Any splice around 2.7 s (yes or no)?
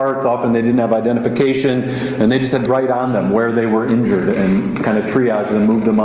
yes